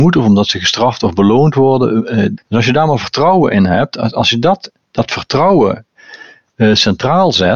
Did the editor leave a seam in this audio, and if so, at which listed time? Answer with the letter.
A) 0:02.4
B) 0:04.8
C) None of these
A